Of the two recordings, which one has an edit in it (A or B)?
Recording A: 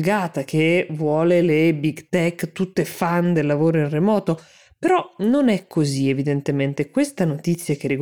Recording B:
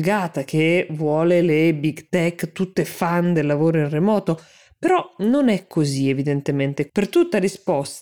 B